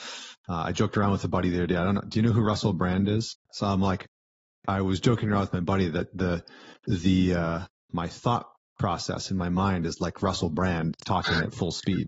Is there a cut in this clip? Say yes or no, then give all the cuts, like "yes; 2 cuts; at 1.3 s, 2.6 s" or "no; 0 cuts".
yes; 2 cuts; at 3.5 s, 7.9 s